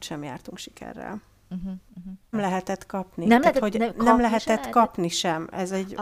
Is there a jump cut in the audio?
yes; 1 cut; at 2.3 s

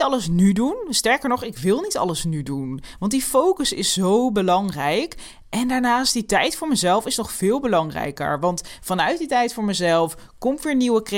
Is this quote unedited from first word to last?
yes; 0 cuts

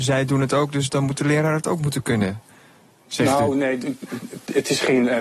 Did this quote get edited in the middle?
no; 0 cuts

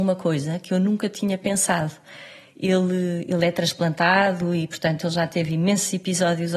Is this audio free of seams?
yes; 0 cuts

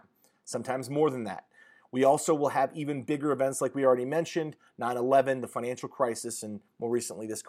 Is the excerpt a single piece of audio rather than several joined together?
yes; 0 cuts

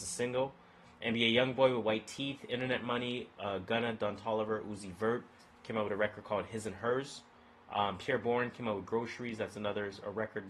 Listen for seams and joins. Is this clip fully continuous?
yes; 0 cuts

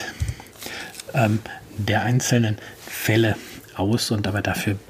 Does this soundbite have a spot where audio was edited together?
no; 0 cuts

